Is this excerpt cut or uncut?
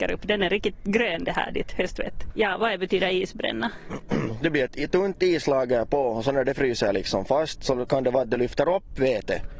cut